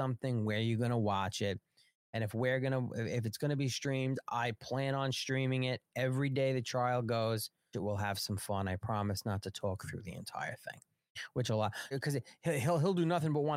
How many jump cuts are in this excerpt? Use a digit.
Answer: 2